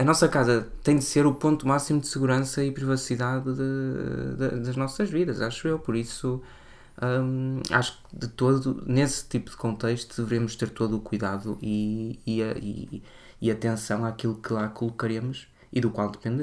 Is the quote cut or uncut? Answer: uncut